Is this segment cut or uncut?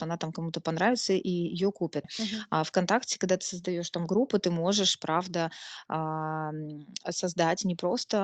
cut